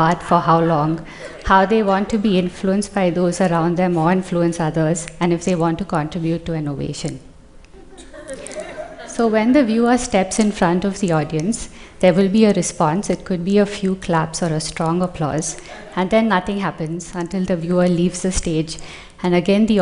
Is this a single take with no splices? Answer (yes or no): yes